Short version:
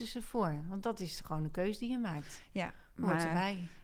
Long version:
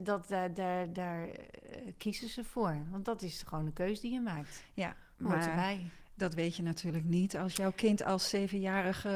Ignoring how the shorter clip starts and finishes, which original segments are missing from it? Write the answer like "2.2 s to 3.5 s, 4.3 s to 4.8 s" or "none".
none